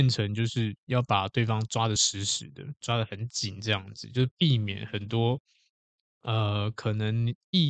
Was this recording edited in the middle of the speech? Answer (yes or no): no